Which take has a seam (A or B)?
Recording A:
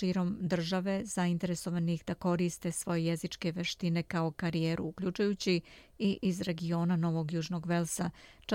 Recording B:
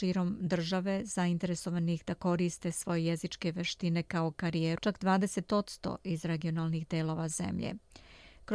B